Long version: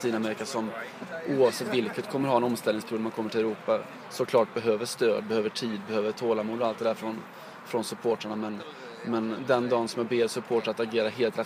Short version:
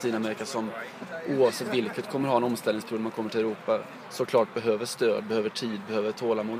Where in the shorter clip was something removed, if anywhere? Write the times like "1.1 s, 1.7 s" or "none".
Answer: none